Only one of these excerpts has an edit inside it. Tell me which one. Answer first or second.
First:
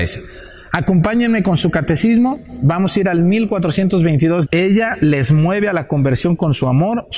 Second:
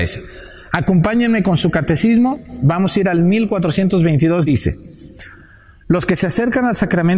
first